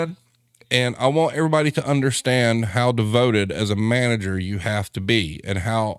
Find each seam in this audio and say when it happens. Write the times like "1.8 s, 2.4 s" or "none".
none